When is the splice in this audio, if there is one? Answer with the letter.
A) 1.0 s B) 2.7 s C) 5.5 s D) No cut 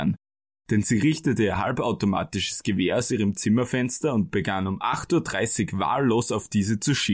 D